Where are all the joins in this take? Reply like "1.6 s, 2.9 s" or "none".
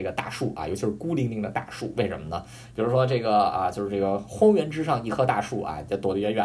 2.7 s